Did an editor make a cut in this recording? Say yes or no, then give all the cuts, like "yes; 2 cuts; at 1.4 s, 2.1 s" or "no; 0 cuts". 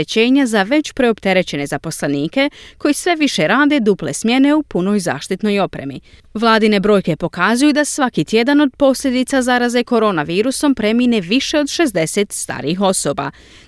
yes; 1 cut; at 6.2 s